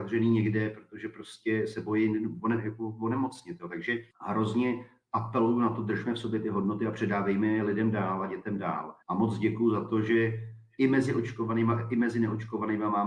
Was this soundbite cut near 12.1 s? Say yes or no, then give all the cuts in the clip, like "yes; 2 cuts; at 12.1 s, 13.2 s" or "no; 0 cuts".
no; 2 cuts; at 4.1 s, 9.0 s